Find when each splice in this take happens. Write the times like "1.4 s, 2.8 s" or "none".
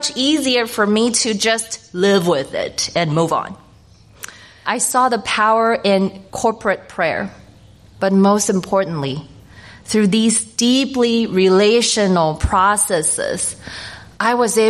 4.6 s, 6.3 s